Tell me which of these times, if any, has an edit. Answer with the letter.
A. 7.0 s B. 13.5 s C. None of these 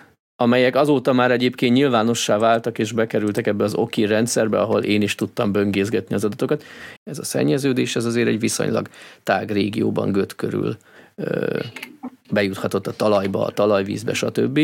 A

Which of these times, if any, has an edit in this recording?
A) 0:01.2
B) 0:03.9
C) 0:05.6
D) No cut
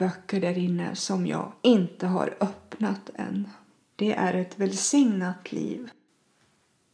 B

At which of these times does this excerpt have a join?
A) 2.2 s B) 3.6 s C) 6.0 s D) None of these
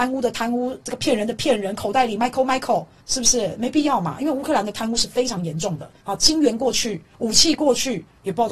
D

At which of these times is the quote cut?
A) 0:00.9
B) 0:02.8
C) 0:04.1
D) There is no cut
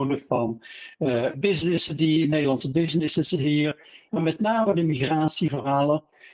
D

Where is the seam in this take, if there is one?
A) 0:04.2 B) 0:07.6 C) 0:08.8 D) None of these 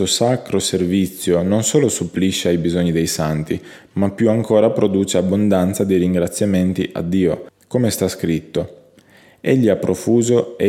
B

